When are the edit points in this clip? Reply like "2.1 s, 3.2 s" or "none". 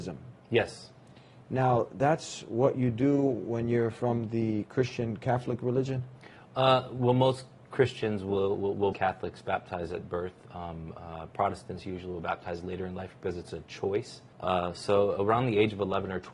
8.9 s, 14.3 s